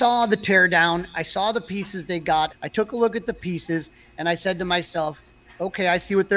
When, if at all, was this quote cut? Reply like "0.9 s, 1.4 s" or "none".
2.5 s